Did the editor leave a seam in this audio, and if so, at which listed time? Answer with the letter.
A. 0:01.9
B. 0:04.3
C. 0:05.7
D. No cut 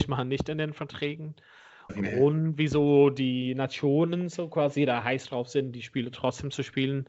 A